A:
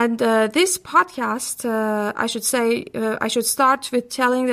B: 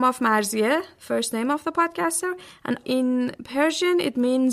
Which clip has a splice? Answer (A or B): B